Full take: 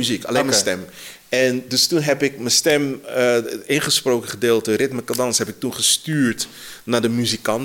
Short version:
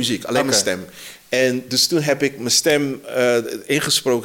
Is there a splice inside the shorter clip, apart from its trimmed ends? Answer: no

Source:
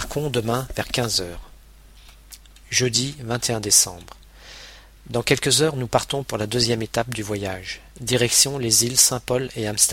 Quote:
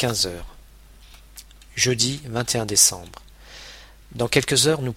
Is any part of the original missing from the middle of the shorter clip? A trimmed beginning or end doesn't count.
no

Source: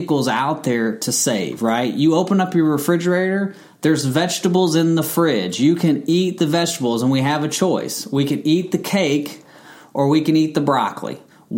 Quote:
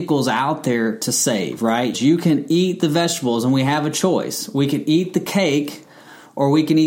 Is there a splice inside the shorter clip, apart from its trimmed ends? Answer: yes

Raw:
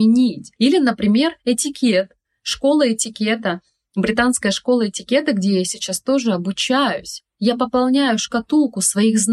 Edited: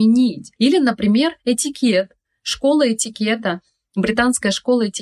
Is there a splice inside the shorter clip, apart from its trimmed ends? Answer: no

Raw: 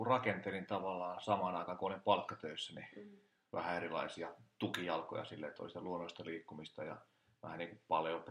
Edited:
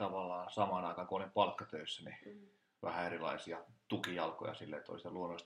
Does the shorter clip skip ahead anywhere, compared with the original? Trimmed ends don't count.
no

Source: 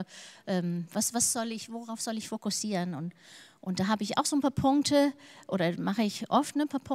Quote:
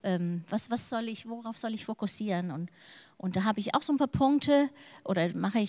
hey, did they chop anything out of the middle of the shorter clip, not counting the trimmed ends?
no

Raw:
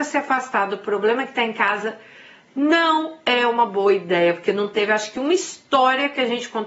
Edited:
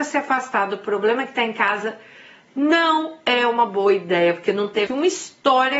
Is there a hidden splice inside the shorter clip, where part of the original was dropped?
yes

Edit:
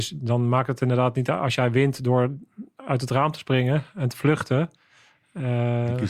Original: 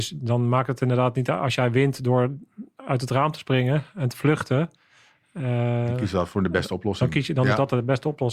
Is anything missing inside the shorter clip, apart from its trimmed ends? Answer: no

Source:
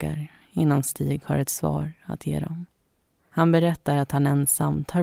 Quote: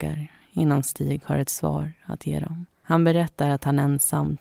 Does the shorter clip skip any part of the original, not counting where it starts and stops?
yes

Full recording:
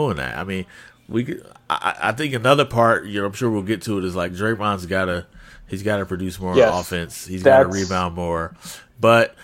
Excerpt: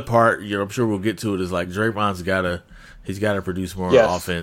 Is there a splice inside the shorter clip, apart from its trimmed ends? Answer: no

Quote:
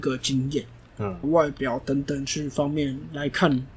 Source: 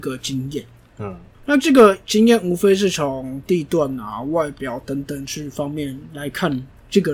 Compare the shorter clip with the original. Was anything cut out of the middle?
yes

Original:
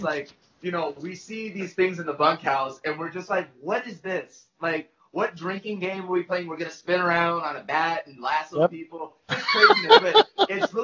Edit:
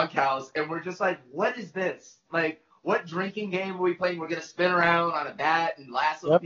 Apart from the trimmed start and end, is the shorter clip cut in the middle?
no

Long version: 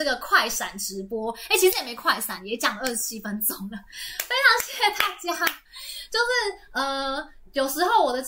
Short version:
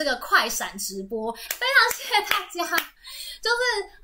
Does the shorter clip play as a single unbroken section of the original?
no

